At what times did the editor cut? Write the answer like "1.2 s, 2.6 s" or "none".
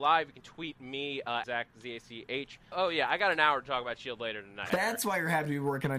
1.4 s, 2.7 s, 4.7 s

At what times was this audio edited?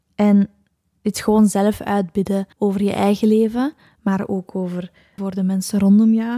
2.5 s, 5.2 s

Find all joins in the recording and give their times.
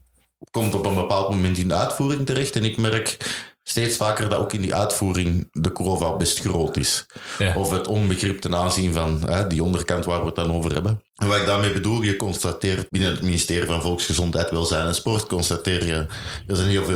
11.1 s, 12.9 s

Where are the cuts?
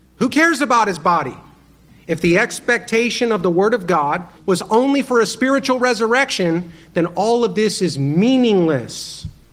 4.4 s

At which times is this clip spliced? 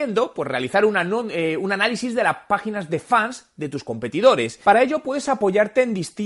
none

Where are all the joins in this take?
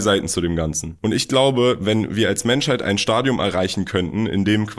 none

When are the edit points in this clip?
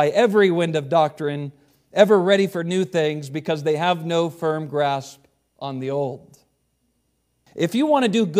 7.5 s

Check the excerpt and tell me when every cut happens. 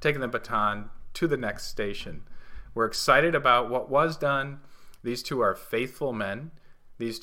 5.0 s

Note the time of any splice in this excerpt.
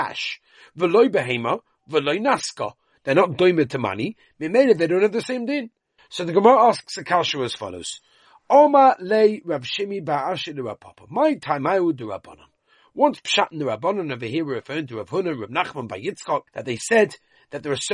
6.0 s, 16.5 s

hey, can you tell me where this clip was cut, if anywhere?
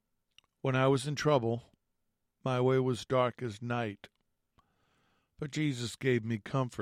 none

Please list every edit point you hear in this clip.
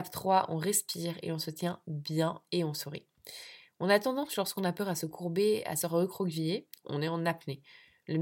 6.8 s

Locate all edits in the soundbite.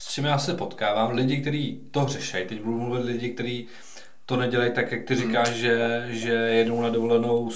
none

